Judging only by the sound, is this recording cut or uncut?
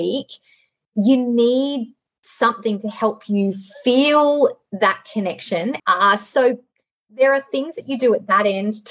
cut